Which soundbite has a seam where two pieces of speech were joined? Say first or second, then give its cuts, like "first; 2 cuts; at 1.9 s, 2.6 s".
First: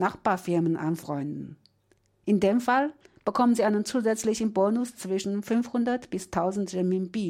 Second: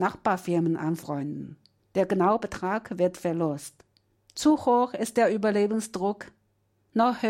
second; 2 cuts; at 1.8 s, 4.2 s